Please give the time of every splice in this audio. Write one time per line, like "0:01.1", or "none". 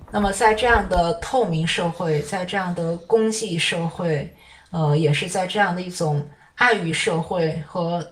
none